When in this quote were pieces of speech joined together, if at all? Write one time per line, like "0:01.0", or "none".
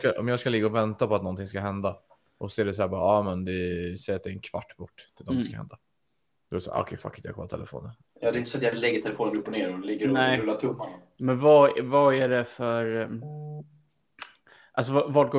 none